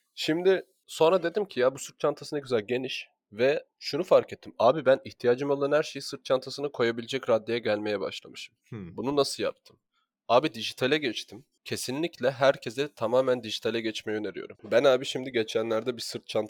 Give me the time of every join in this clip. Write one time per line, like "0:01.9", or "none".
0:08.6
0:14.5